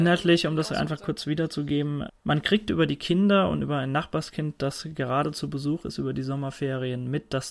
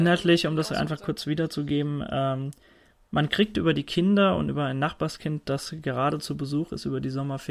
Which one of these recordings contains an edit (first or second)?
first